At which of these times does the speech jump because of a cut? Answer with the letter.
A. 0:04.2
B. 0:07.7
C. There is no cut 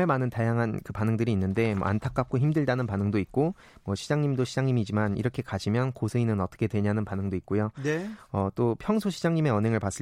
C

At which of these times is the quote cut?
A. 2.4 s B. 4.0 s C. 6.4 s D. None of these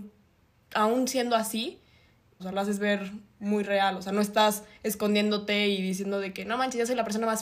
A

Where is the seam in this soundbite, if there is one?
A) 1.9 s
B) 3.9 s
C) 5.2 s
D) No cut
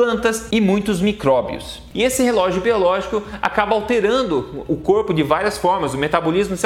A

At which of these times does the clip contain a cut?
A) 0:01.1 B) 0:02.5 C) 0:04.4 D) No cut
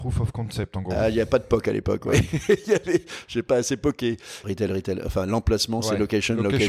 C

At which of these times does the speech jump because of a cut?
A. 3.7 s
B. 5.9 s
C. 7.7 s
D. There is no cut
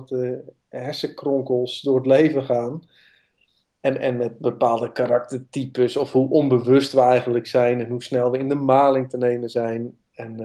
D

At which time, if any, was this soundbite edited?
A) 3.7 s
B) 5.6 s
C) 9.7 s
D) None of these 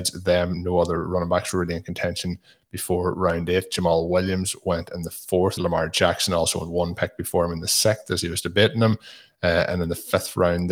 B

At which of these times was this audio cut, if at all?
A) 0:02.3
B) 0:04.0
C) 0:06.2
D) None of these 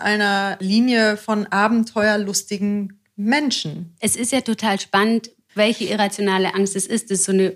B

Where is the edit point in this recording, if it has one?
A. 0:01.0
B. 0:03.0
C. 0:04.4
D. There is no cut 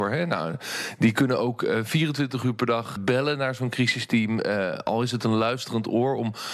B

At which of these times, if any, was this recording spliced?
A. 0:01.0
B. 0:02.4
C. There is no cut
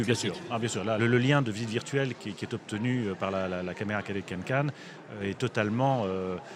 A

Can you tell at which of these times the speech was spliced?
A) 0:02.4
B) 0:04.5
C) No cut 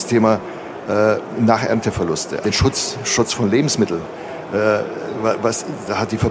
A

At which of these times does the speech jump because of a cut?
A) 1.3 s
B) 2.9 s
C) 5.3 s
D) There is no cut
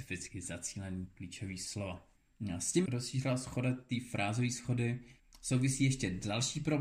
B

